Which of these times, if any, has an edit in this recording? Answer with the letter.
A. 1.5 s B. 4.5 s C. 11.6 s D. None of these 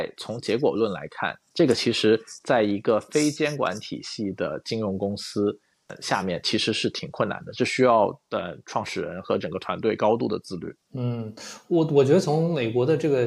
A